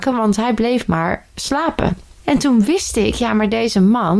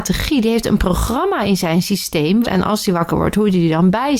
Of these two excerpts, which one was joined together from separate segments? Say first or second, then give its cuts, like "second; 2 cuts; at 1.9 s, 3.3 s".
second; 1 cut; at 2.4 s